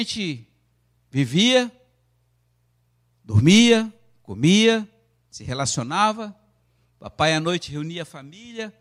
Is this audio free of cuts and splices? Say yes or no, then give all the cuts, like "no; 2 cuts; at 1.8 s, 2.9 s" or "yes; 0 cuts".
yes; 0 cuts